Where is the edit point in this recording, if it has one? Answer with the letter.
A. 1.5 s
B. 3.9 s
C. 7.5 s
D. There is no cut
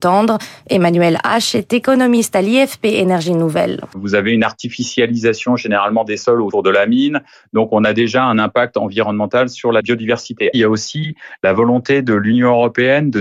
B